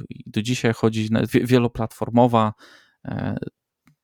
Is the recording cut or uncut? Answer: cut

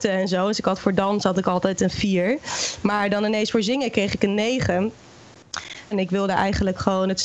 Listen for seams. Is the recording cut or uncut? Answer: cut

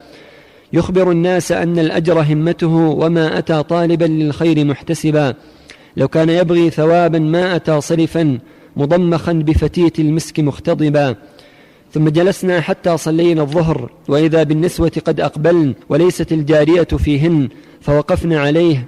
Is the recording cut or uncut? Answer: cut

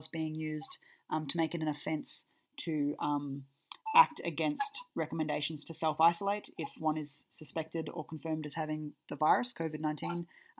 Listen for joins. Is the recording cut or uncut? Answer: uncut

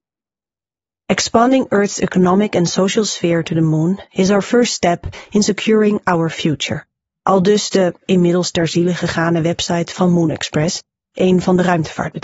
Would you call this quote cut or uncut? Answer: uncut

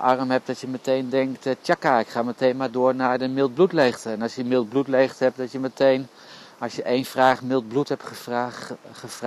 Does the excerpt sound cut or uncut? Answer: uncut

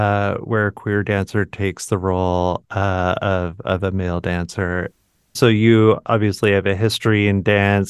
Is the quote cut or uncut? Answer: uncut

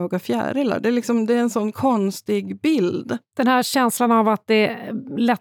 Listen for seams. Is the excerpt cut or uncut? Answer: uncut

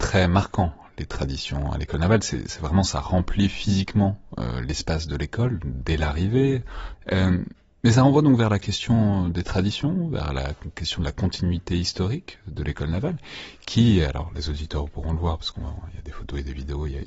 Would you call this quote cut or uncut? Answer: cut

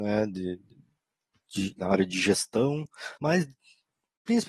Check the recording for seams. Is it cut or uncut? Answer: cut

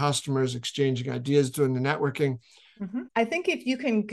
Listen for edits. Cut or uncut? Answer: cut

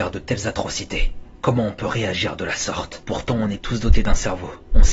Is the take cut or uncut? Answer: cut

